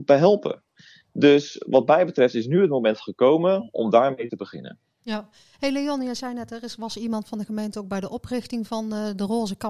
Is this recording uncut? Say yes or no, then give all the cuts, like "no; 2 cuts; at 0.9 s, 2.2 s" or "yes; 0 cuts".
yes; 0 cuts